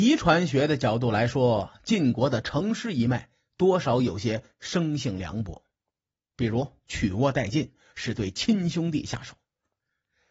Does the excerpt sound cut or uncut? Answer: uncut